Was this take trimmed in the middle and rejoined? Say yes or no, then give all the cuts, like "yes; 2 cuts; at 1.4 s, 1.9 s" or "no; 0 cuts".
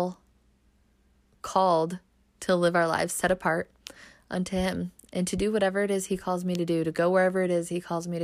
no; 0 cuts